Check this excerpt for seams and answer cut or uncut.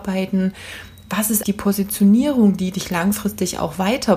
cut